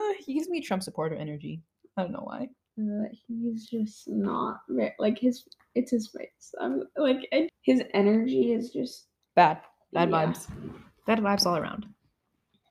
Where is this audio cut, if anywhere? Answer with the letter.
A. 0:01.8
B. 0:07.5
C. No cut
B